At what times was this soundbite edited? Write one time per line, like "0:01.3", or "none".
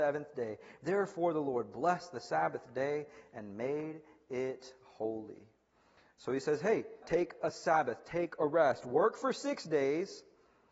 0:07.0